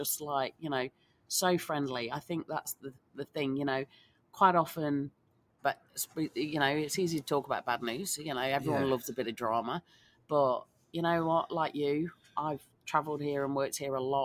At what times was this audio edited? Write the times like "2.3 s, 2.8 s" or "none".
5.6 s